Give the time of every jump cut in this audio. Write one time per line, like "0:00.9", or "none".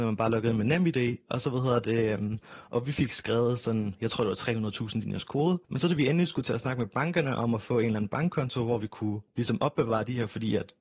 0:05.6